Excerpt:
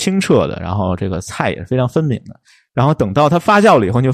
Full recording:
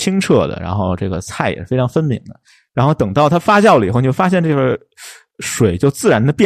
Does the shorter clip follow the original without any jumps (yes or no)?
yes